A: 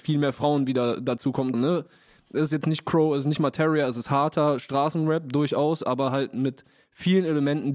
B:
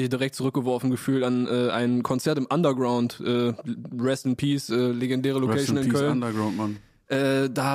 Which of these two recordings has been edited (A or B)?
A